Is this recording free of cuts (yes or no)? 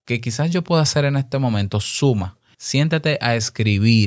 no